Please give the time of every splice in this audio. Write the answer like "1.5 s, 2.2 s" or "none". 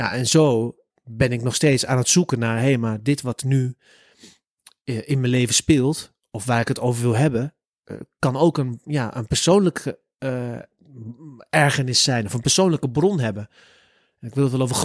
0.9 s